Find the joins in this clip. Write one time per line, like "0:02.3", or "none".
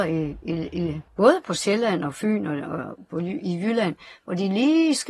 0:01.1